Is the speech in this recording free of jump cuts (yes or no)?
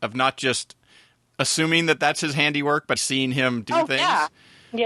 no